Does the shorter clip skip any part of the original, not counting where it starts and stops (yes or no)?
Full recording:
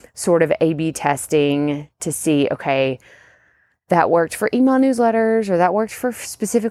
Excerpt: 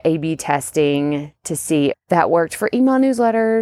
yes